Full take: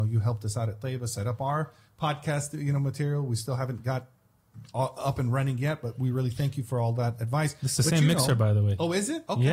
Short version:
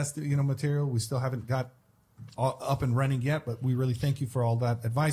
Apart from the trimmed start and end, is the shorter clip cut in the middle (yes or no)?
no